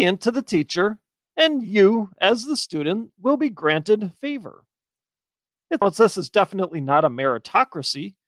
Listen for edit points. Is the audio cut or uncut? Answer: cut